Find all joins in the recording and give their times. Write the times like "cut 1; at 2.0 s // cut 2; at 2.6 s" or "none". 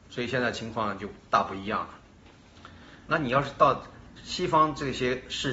cut 1; at 3.1 s